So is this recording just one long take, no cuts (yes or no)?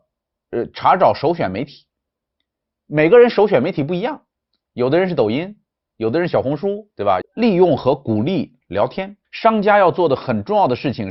no